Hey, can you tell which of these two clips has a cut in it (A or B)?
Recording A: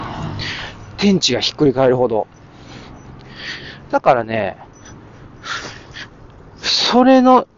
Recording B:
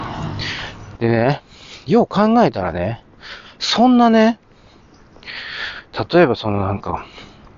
B